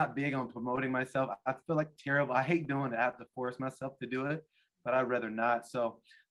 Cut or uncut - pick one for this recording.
uncut